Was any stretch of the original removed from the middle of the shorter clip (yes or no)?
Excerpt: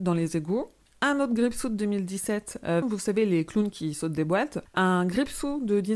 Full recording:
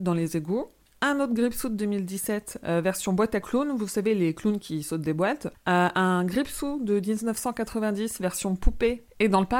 yes